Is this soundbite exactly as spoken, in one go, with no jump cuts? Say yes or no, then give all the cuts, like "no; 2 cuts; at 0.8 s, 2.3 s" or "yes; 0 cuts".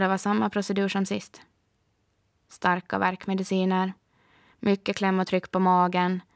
yes; 0 cuts